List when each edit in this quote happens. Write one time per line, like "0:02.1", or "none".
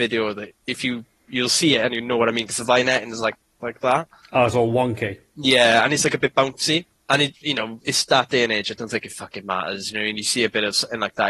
none